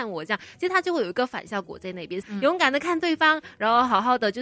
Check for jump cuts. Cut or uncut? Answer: cut